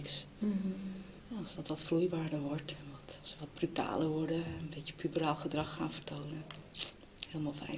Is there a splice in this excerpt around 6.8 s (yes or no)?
no